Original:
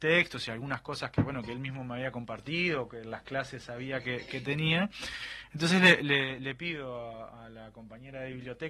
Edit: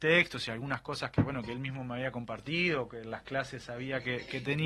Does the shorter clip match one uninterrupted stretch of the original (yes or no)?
yes